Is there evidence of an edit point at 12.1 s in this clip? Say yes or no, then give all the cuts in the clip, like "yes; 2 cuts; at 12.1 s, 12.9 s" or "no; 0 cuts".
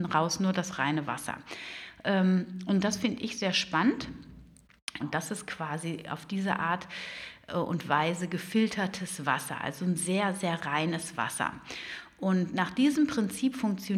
no; 1 cut; at 5.0 s